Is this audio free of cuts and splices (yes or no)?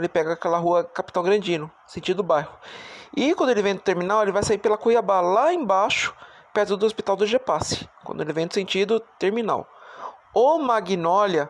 yes